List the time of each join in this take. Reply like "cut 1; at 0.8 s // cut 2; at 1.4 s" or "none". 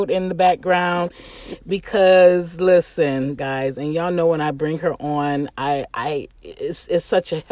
cut 1; at 3.4 s